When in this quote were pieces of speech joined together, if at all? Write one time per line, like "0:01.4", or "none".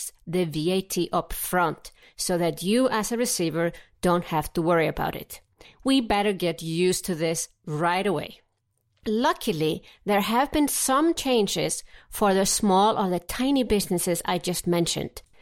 0:05.6